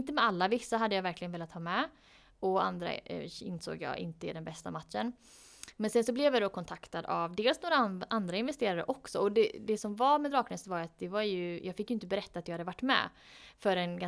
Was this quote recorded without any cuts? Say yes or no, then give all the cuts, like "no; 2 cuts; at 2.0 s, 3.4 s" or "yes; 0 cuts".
yes; 0 cuts